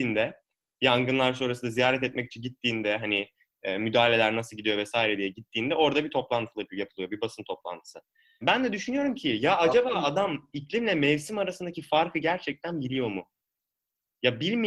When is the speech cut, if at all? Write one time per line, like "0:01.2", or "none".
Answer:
0:08.4